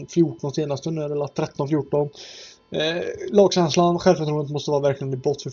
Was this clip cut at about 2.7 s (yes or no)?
no